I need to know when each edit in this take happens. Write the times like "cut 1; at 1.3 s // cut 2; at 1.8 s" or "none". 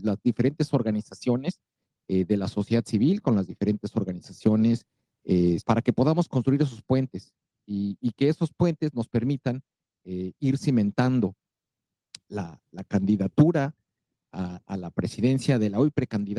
cut 1; at 5.6 s // cut 2; at 12.3 s